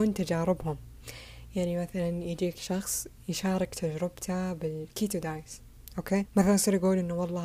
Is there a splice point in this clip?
yes; 1 cut; at 6.2 s

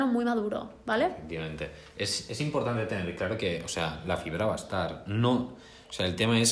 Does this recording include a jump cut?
no; 0 cuts

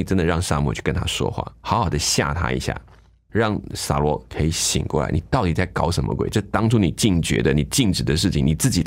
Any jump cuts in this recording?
no; 0 cuts

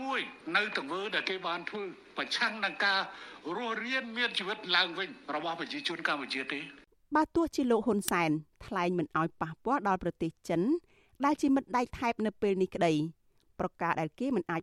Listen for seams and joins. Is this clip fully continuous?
yes; 0 cuts

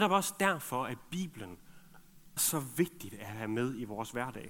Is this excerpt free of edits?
no; 1 cut; at 2.4 s

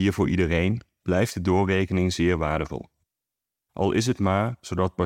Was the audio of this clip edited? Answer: no; 0 cuts

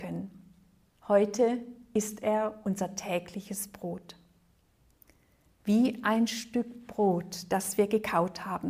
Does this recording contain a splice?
yes; 1 cut; at 0.9 s

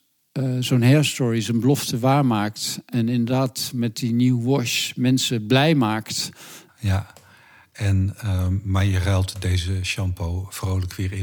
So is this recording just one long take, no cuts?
no; 1 cut; at 6.7 s

